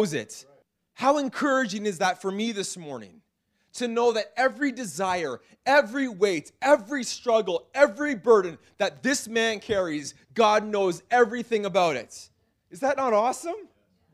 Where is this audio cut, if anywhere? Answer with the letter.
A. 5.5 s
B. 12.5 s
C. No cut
B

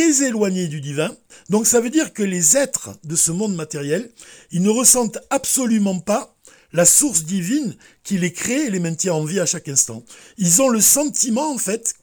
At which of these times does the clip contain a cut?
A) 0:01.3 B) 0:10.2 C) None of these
A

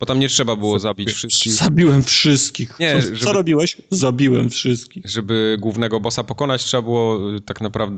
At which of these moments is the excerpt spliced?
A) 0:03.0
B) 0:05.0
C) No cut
A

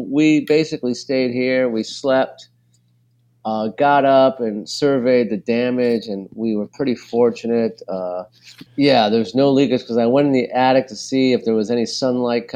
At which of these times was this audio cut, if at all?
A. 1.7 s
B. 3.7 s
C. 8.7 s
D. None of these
C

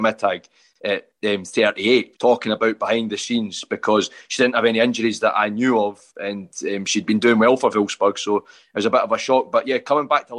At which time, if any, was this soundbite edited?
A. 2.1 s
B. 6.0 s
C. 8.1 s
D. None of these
A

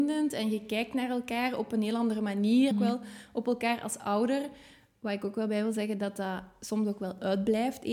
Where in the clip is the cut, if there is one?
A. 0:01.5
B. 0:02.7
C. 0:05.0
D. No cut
B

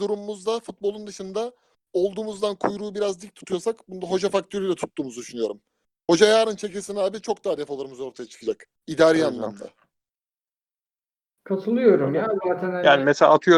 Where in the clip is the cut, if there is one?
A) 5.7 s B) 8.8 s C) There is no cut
B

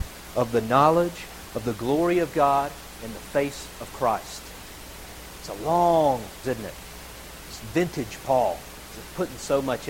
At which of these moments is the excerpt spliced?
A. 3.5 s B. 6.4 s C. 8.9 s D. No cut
B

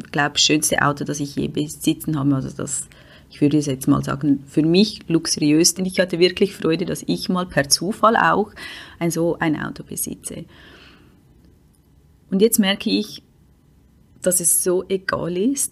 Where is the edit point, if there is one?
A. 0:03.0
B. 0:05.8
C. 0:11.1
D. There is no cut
B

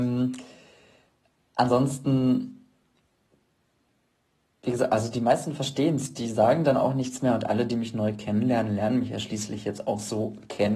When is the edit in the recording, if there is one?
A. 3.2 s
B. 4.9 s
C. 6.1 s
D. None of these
D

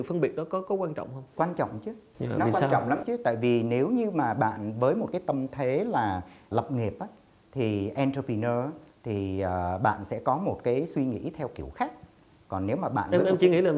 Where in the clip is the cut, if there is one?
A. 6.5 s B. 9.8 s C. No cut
A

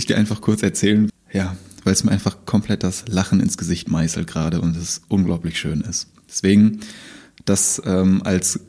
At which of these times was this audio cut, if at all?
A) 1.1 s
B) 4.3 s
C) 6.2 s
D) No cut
A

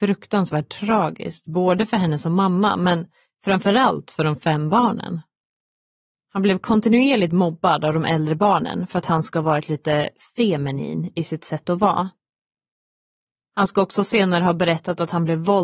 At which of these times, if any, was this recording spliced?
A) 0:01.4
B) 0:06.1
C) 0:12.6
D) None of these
B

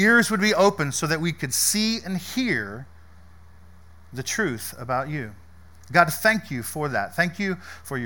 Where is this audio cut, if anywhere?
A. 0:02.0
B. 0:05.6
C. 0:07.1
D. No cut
D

